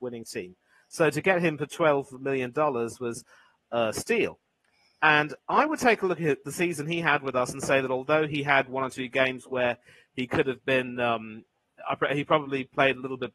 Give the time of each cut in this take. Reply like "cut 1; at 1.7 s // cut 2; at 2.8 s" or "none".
none